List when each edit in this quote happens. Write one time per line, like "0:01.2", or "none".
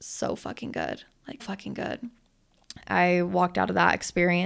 0:01.4
0:02.8